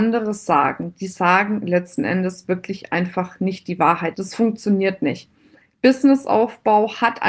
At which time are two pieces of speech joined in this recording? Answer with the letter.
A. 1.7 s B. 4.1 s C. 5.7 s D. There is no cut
B